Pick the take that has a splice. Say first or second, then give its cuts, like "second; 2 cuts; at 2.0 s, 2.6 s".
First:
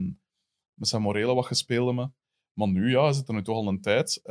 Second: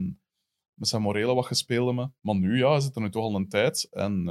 second; 1 cut; at 2.2 s